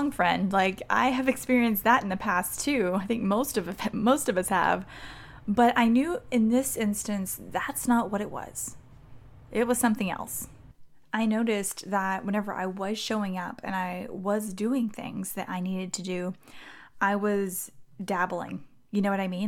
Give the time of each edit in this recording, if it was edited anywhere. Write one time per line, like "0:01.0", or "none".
none